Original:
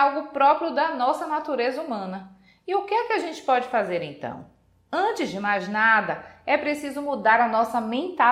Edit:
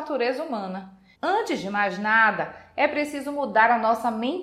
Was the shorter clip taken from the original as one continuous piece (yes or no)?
no